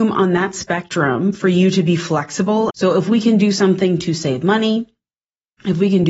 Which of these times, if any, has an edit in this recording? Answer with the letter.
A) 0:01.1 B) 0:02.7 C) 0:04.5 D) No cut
B